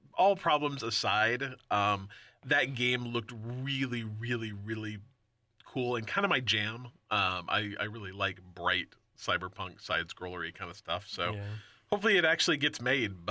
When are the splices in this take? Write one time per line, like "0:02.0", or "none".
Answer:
none